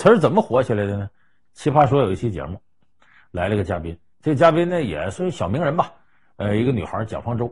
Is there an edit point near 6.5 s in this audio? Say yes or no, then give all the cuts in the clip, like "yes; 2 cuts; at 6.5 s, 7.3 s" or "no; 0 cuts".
no; 0 cuts